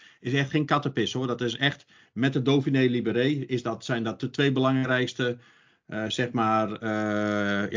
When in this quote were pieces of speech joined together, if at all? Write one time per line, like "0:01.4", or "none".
none